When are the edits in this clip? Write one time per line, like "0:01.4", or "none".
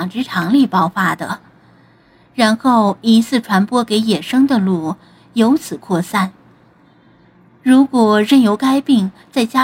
none